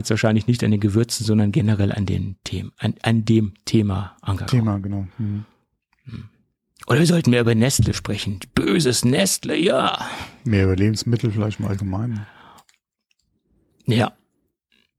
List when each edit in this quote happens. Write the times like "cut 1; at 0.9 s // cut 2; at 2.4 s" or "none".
none

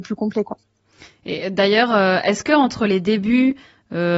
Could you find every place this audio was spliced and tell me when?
none

